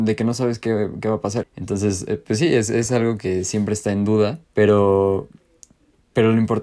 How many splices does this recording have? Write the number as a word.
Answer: two